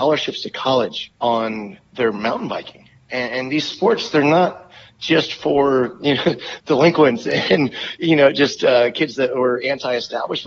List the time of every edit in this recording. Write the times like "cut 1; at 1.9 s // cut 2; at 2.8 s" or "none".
cut 1; at 1.2 s